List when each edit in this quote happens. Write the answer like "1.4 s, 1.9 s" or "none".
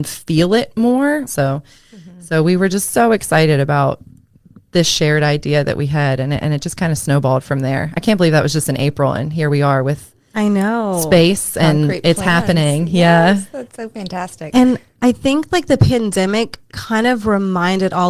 1.3 s